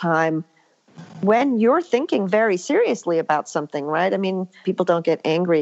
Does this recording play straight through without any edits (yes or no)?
no